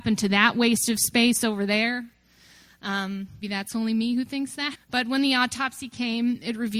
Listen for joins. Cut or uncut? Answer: cut